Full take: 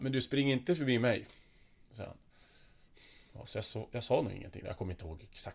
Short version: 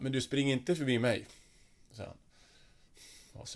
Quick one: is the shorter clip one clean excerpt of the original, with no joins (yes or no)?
yes